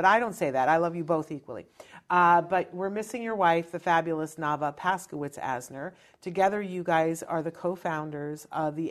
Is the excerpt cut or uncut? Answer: uncut